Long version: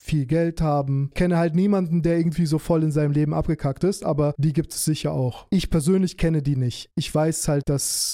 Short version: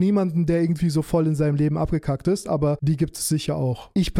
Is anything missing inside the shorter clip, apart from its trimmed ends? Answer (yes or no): no